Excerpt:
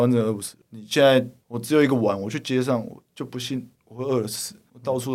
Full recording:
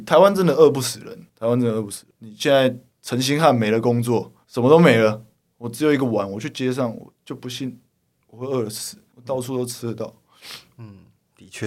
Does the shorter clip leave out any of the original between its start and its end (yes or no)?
yes